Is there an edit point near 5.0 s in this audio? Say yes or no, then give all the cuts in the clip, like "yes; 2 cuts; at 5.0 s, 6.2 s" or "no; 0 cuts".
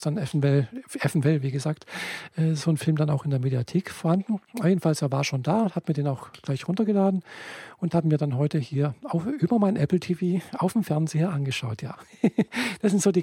no; 0 cuts